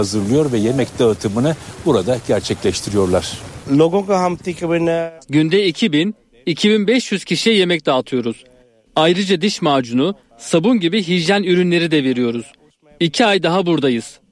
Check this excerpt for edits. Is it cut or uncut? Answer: cut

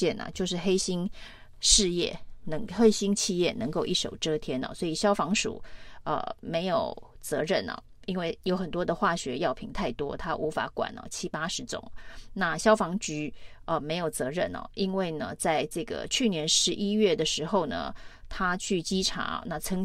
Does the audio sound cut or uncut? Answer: uncut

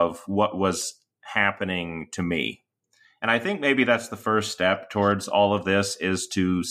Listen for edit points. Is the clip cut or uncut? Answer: uncut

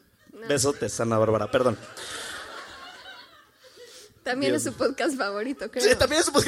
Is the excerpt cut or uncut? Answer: uncut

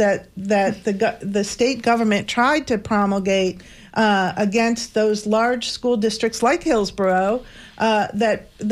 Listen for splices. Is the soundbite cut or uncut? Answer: uncut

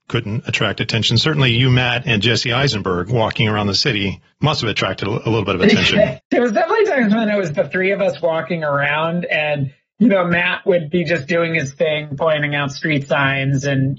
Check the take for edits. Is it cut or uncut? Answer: cut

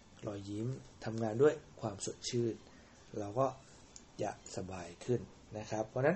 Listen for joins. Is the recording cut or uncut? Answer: uncut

